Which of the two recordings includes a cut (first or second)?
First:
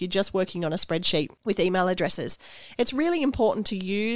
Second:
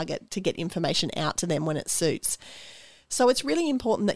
first